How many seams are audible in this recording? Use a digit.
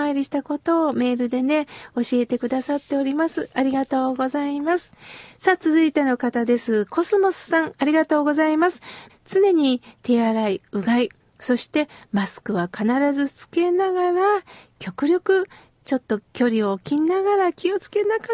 1